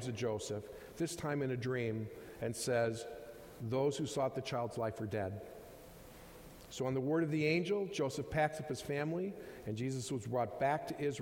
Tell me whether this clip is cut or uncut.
uncut